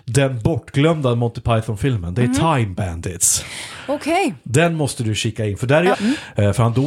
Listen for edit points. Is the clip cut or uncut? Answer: cut